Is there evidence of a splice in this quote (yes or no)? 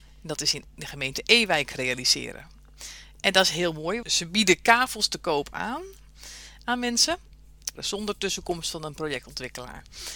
yes